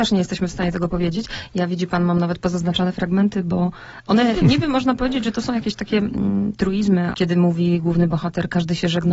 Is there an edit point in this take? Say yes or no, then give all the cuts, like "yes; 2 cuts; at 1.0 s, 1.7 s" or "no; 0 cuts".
yes; 2 cuts; at 4.3 s, 7.1 s